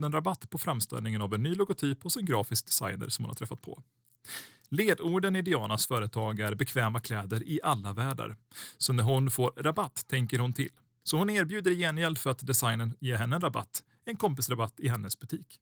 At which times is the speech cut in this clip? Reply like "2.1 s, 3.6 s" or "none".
11.0 s